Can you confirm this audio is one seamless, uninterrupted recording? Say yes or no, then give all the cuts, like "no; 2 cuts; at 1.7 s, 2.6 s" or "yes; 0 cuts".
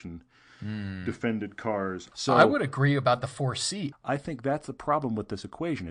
no; 2 cuts; at 2.1 s, 3.9 s